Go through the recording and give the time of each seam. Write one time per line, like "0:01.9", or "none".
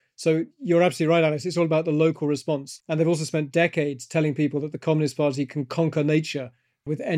none

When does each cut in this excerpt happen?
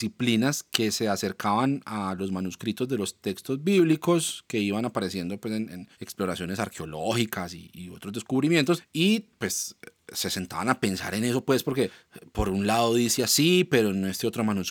none

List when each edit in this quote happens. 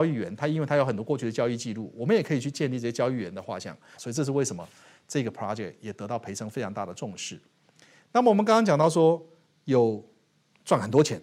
0:03.9

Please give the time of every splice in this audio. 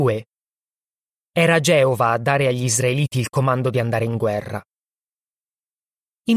none

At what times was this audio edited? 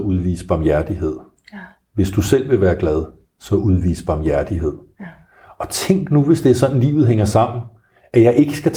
none

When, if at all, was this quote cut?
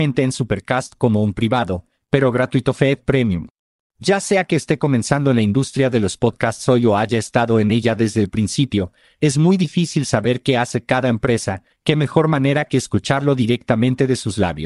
0:03.8
0:11.7

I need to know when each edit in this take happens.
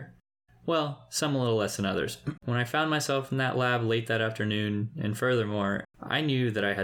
0:02.4
0:05.8

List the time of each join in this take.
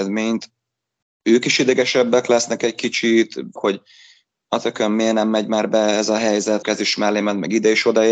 0:03.6
0:06.6

